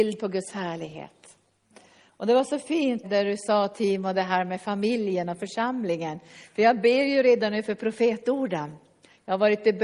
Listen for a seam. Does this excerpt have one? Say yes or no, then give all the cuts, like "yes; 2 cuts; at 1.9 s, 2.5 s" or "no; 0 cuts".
yes; 1 cut; at 3.0 s